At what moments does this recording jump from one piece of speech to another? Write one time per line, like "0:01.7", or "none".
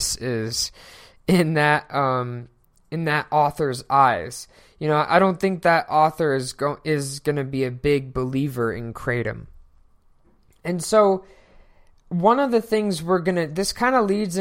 none